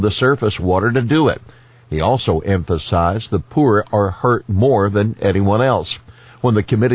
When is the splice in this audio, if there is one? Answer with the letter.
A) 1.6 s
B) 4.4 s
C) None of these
C